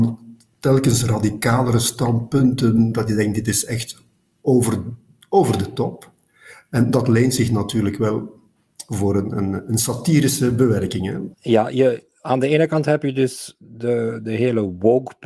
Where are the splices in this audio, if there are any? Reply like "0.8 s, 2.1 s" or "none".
11.3 s